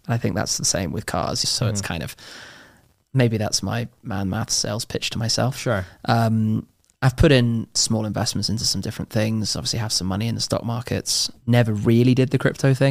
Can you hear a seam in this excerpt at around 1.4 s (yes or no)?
yes